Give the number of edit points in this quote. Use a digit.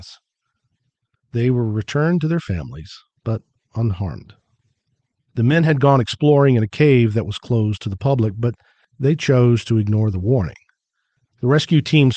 2